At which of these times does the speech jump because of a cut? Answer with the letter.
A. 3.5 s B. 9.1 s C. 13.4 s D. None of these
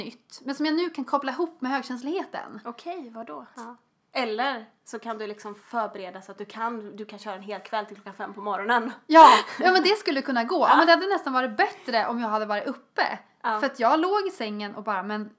A